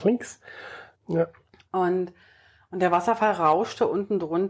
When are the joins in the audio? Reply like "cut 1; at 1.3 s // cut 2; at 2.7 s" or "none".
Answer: cut 1; at 0.9 s